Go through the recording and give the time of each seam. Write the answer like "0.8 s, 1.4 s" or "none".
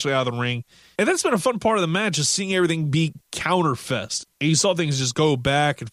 1.0 s, 4.2 s